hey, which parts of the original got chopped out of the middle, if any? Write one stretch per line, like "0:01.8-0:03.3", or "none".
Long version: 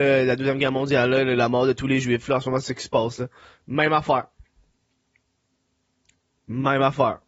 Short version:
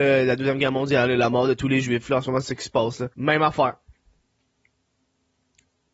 0:01.1-0:01.2
0:03.3-0:03.6